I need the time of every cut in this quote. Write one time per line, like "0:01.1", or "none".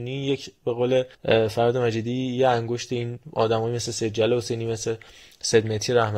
0:01.1
0:03.2